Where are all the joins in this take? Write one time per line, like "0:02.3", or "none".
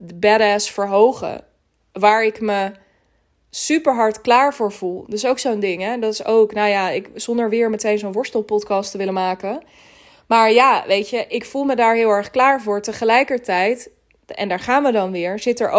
none